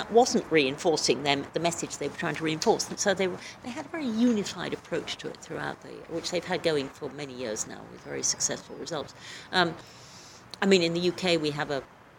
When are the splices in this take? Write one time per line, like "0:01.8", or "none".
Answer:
none

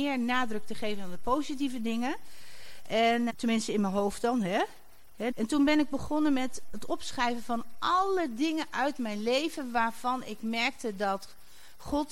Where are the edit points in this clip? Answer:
0:03.3
0:05.3
0:06.7

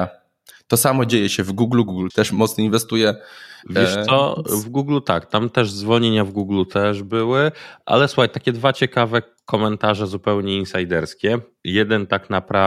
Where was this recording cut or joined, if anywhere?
0:02.1

